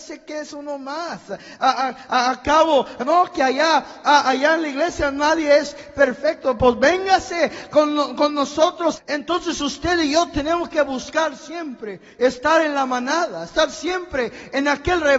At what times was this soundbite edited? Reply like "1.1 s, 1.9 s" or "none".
3.0 s, 9.0 s